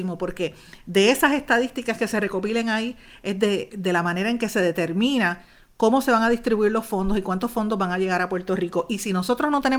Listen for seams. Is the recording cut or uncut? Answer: uncut